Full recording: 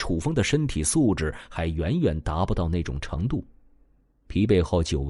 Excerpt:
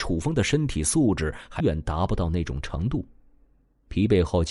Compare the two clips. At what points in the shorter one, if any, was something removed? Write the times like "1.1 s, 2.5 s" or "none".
1.6 s